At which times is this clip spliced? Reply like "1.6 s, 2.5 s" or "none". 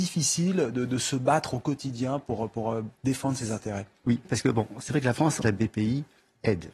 4.2 s, 5.4 s